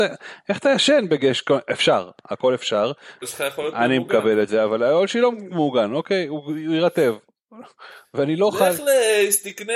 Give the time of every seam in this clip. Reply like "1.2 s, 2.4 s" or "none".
3.2 s